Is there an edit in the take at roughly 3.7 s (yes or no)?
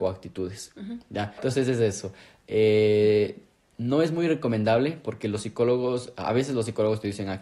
no